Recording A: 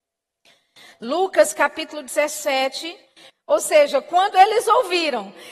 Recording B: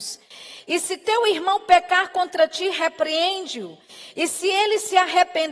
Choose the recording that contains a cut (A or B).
A